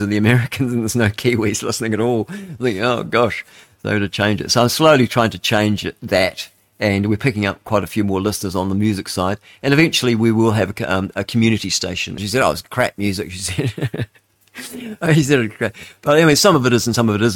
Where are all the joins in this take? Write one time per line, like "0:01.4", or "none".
0:12.2